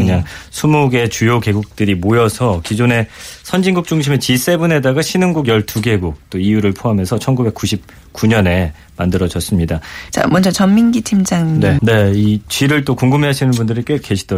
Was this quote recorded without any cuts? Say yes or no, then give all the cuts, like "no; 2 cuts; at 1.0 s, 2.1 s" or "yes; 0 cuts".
no; 2 cuts; at 10.1 s, 11.8 s